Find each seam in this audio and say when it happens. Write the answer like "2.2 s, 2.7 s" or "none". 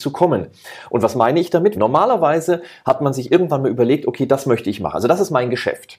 1.7 s